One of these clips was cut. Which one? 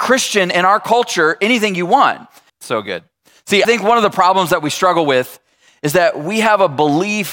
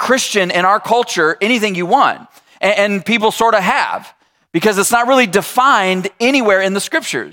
first; 2 cuts; at 2.5 s, 3.6 s

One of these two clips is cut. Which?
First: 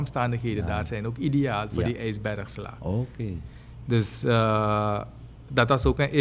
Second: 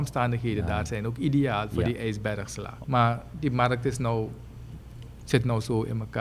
second; 1 cut; at 2.8 s

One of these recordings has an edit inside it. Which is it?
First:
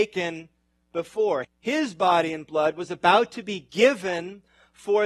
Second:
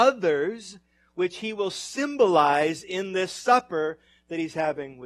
first; 1 cut; at 1.4 s

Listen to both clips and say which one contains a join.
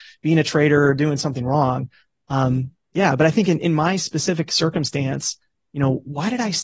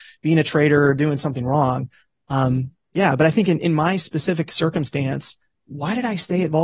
second; 1 cut; at 5.7 s

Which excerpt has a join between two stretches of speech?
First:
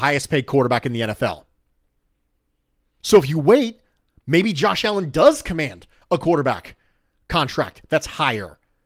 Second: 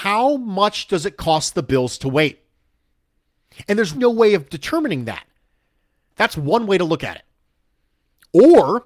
second; 2 cuts; at 3.9 s, 6.1 s

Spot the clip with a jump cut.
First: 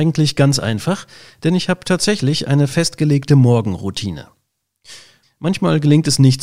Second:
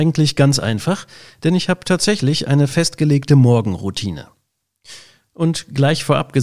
first; 1 cut; at 5.2 s

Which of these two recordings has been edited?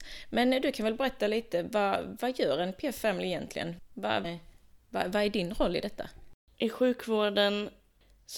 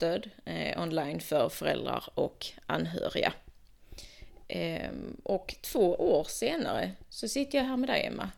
first; 2 cuts; at 4.2 s, 6.5 s

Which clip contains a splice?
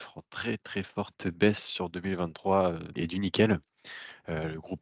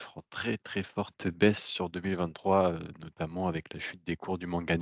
first; 1 cut; at 3.0 s

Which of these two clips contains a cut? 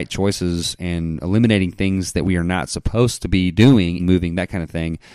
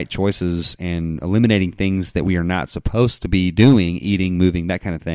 first; 1 cut; at 4.0 s

